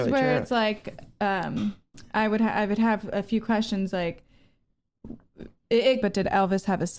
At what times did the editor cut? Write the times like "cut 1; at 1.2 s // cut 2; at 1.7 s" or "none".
cut 1; at 6.0 s